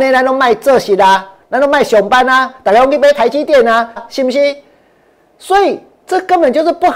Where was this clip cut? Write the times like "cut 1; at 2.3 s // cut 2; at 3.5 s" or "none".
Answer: cut 1; at 4.0 s